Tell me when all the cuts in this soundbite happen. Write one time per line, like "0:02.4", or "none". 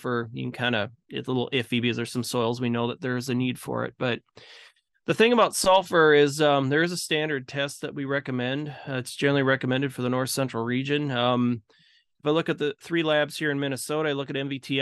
none